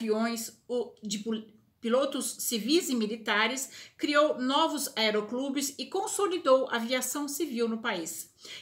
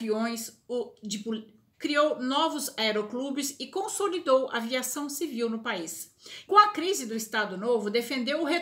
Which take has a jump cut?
second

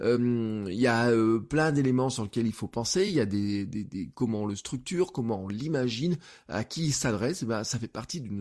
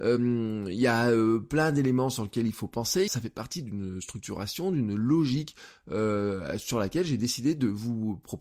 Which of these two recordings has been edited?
second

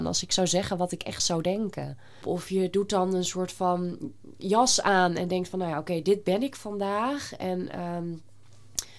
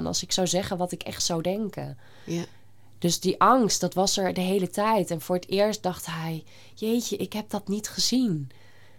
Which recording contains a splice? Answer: first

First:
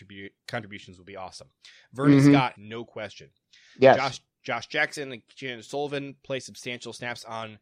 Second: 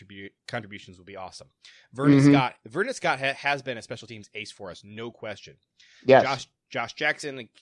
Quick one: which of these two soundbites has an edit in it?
first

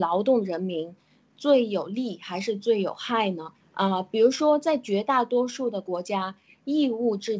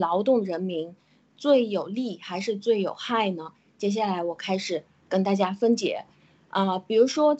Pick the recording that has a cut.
first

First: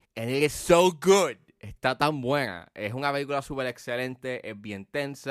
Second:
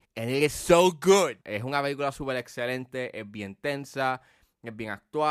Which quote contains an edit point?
second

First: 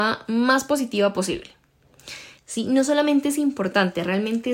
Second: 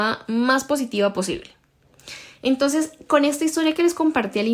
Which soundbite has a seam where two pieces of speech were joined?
first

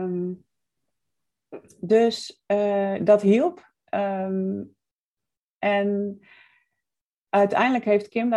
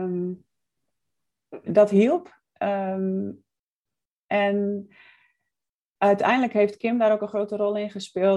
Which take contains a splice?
second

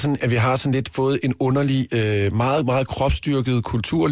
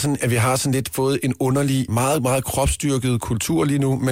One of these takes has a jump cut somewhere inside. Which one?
second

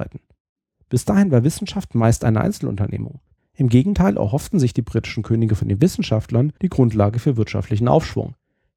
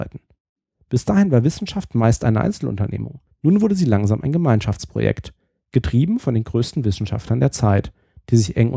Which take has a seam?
first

